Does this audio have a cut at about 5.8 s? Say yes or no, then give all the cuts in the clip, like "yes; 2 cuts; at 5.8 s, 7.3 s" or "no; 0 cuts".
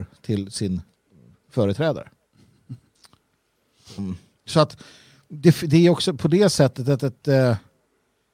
no; 2 cuts; at 4.0 s, 7.2 s